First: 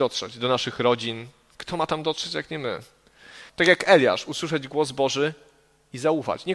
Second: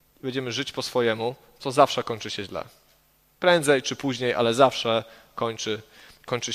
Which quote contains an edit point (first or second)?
first